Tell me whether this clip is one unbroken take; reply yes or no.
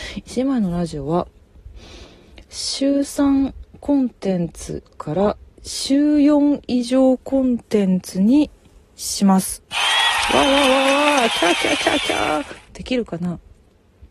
no